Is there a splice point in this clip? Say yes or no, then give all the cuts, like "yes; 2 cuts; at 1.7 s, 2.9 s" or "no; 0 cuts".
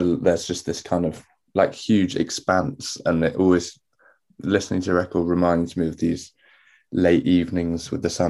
no; 0 cuts